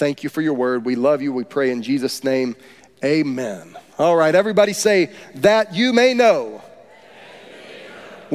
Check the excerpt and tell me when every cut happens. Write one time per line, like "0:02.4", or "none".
none